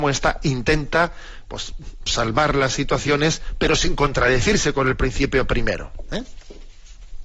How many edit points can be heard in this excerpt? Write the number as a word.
one